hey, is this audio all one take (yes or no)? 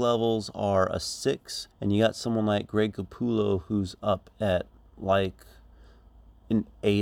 no